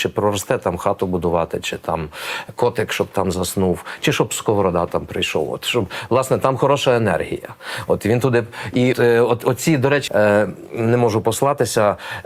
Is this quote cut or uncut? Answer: cut